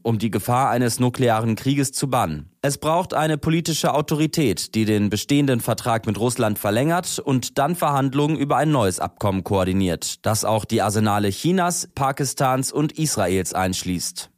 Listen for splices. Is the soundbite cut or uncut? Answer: cut